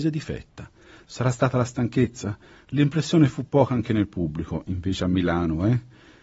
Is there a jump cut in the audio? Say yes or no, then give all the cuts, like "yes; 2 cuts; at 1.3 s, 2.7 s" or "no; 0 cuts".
yes; 1 cut; at 1.0 s